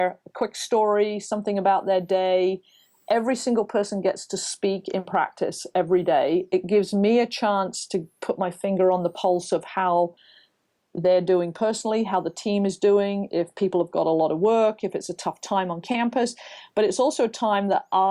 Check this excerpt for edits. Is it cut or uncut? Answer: uncut